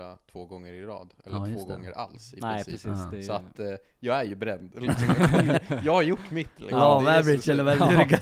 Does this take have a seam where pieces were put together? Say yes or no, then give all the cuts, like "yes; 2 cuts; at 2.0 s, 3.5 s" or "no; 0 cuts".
no; 0 cuts